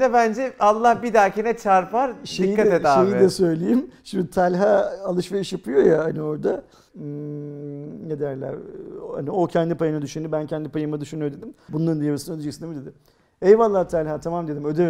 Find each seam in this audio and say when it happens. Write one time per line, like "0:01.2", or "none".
0:06.9
0:11.7